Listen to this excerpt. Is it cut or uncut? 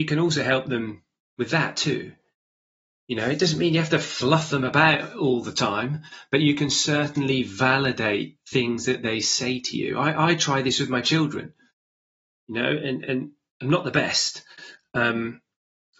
uncut